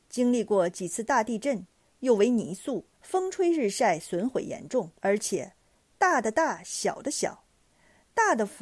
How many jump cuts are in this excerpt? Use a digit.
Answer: 2